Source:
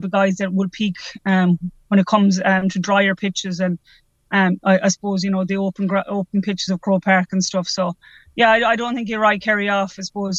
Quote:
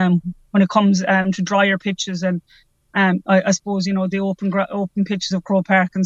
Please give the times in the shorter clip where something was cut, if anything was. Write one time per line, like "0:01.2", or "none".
none